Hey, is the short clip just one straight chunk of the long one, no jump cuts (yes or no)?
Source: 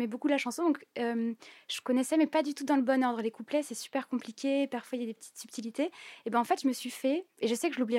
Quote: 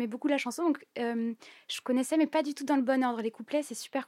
yes